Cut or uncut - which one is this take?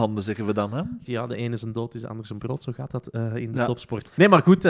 cut